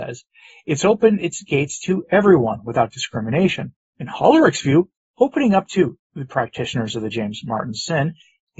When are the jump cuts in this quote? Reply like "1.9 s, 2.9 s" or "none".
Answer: 3.9 s